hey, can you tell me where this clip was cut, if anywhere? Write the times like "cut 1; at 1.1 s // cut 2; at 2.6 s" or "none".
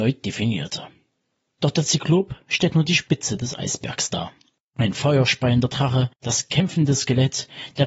none

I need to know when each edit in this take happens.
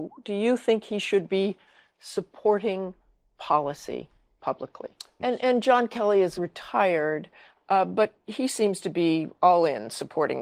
cut 1; at 5.2 s // cut 2; at 6.4 s

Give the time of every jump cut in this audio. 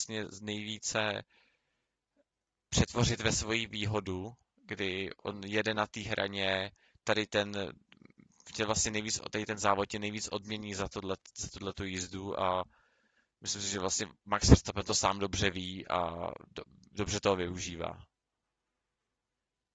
none

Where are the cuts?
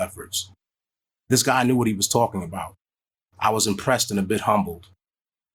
none

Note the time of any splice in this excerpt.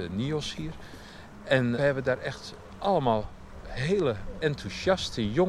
cut 1; at 1.8 s // cut 2; at 4.4 s

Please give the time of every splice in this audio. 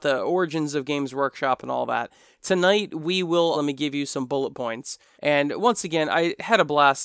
cut 1; at 3.5 s // cut 2; at 5.1 s

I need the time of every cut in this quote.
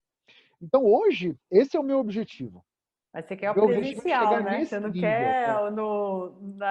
none

